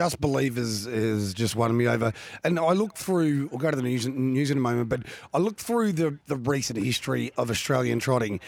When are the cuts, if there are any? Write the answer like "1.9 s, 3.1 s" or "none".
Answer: none